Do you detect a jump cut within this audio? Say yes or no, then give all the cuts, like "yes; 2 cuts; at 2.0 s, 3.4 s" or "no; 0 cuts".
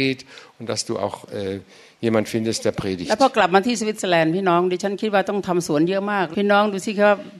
yes; 1 cut; at 6.3 s